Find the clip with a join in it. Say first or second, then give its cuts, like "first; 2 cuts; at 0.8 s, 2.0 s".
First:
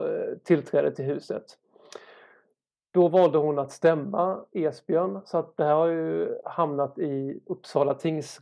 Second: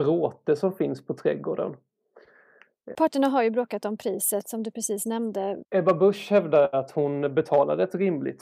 second; 2 cuts; at 2.9 s, 5.6 s